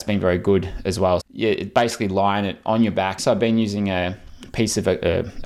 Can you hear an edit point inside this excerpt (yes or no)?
yes